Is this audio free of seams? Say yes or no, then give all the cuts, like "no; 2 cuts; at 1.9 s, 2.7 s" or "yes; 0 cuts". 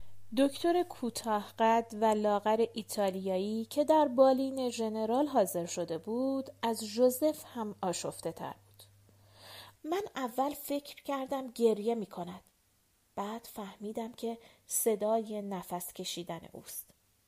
no; 1 cut; at 9.7 s